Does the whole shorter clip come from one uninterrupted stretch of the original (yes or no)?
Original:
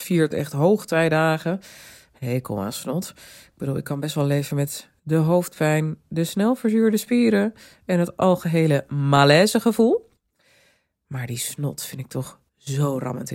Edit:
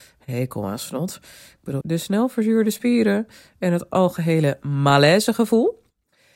no